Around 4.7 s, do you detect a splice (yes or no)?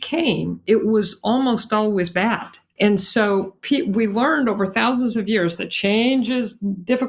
no